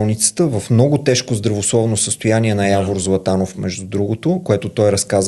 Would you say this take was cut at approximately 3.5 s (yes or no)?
no